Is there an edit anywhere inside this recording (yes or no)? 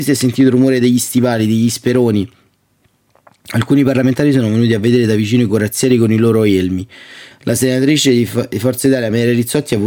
yes